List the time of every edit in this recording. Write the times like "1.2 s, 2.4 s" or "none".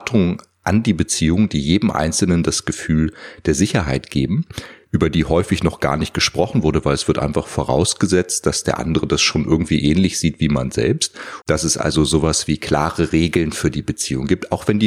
11.4 s